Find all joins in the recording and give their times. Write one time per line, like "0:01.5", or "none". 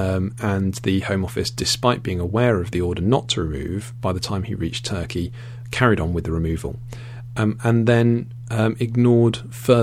none